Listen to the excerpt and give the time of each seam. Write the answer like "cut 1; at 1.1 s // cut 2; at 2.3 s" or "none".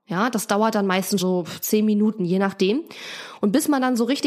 cut 1; at 1.2 s